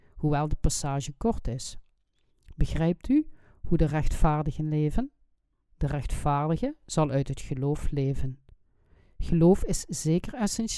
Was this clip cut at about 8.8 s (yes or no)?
no